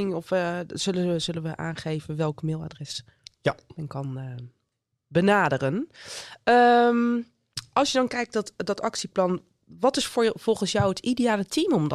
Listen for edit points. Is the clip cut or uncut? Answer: uncut